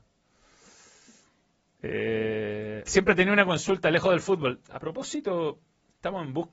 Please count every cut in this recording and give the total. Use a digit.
2